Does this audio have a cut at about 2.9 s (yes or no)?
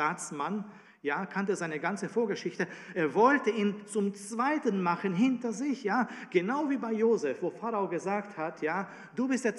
no